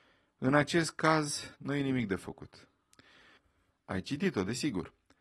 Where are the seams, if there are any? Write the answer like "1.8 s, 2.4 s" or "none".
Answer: 1.5 s, 3.7 s

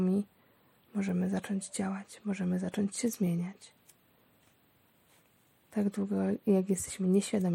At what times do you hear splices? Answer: none

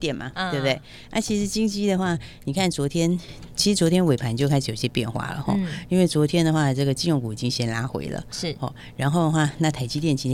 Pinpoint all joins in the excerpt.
none

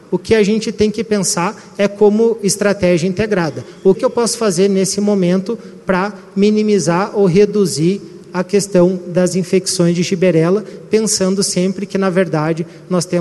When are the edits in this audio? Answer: 3.9 s

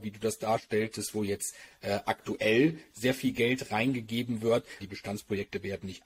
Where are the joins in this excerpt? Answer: 4.8 s

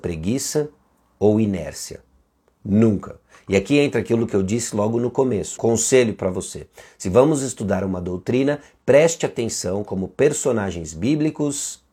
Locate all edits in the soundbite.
5.6 s

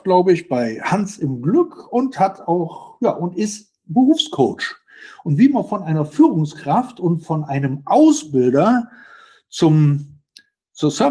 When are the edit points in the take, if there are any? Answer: none

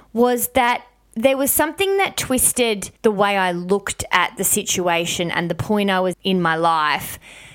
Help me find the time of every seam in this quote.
3.0 s, 6.1 s

